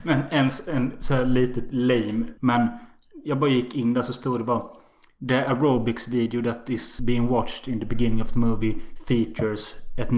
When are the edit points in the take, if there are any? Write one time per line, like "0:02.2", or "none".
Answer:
0:02.4
0:07.0